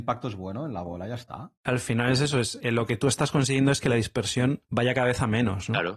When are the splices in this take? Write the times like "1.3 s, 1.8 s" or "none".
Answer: 1.5 s